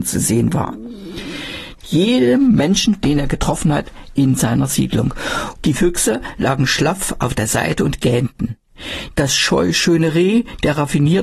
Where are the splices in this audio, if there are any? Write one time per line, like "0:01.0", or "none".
0:01.8
0:05.6
0:09.1

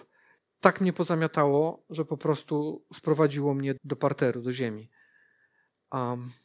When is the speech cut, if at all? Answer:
0:03.8

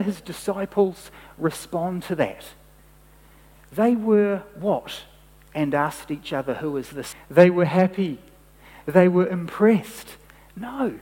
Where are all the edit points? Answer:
0:07.1

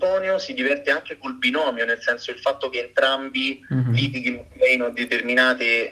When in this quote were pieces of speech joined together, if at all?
none

